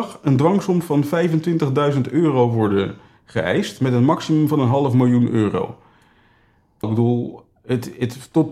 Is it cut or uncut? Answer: cut